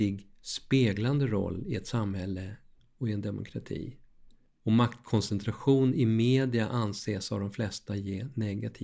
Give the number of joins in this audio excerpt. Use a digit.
0